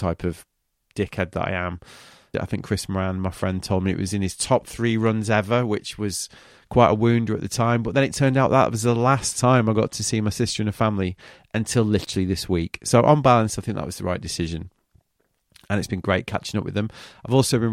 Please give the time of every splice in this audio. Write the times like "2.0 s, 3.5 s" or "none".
2.3 s